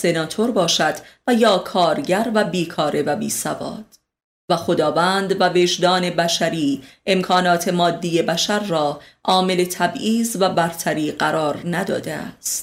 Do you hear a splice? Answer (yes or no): no